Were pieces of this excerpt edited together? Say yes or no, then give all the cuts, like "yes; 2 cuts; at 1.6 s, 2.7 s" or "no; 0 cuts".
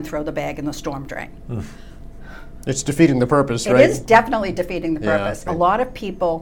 yes; 1 cut; at 5.5 s